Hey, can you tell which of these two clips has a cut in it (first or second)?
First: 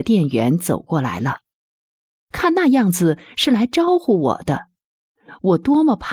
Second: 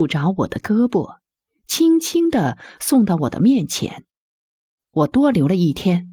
second